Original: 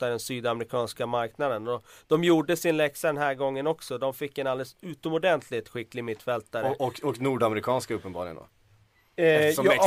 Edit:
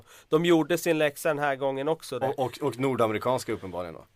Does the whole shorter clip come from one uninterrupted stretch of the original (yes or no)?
no